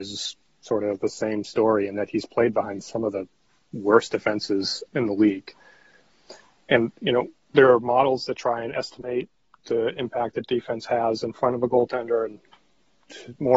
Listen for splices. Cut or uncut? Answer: uncut